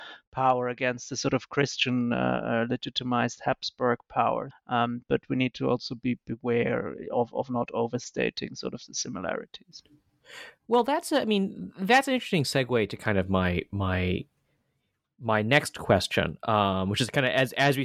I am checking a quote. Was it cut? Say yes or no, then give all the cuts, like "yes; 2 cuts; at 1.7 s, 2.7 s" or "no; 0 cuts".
yes; 1 cut; at 4.5 s